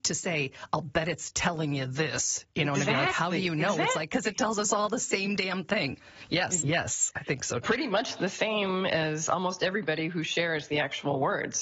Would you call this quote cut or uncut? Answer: cut